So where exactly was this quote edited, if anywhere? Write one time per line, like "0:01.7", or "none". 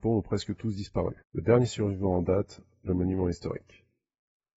0:01.2